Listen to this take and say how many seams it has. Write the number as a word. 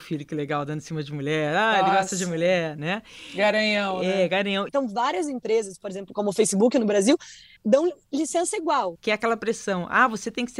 three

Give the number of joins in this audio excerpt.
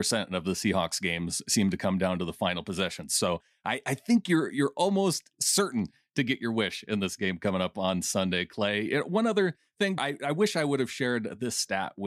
one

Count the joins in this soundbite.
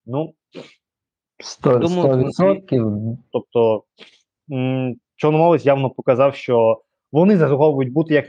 one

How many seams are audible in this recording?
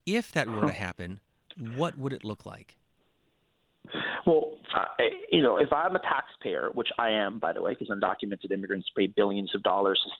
one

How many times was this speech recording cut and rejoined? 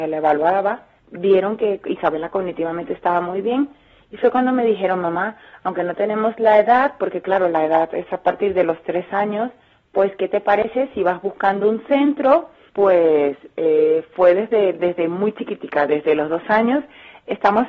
one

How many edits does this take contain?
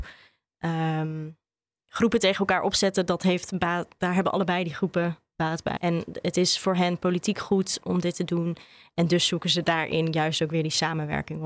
one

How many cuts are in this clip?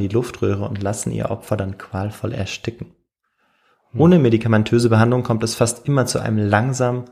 zero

